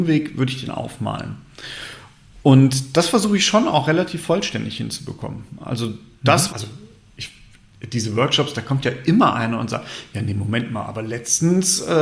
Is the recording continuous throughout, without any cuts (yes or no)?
no